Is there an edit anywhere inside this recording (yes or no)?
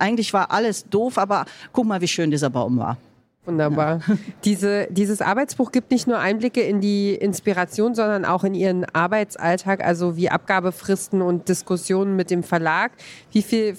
no